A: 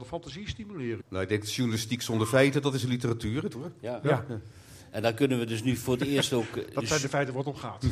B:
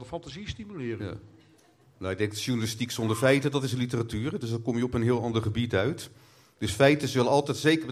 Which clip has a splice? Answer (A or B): A